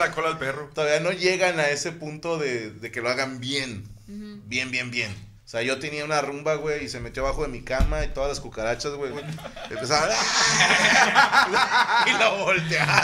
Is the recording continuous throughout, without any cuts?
no; 2 cuts; at 5.4 s, 9.1 s

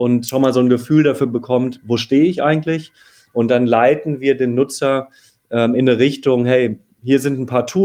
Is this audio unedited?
yes; 0 cuts

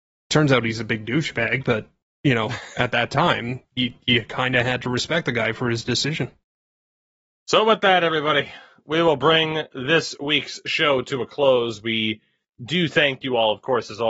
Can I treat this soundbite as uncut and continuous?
yes; 0 cuts

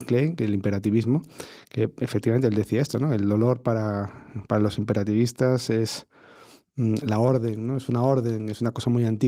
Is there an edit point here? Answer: no; 0 cuts

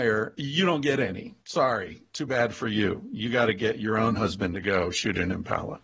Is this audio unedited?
yes; 0 cuts

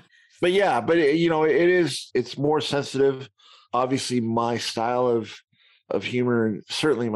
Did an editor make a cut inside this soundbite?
no; 0 cuts

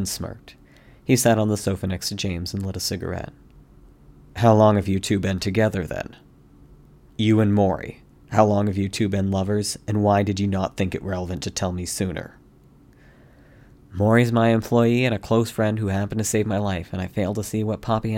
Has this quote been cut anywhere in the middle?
yes; 1 cut; at 7.1 s

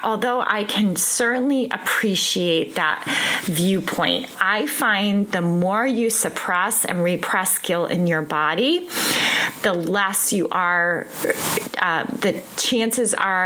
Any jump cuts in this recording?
yes; 2 cuts; at 4.3 s, 12.2 s

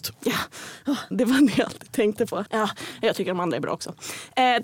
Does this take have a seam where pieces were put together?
yes; 2 cuts; at 1.1 s, 2.5 s

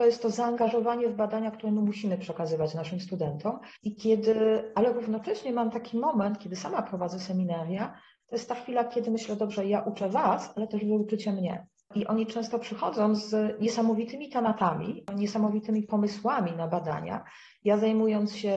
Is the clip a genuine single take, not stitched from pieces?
no; 1 cut; at 3.8 s

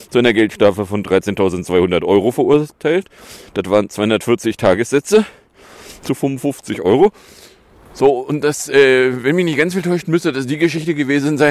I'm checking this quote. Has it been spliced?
no; 0 cuts

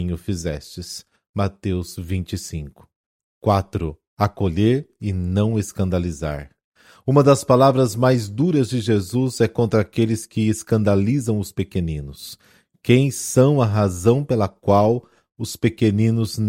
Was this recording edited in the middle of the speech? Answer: no; 0 cuts

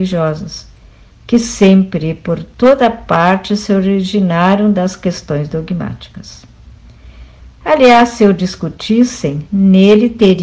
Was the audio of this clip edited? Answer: no; 0 cuts

